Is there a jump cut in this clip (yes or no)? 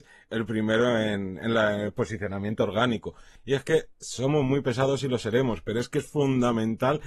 yes